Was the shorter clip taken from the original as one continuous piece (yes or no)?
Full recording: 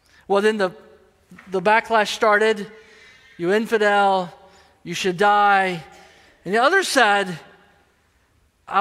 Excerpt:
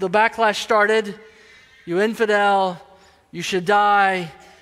yes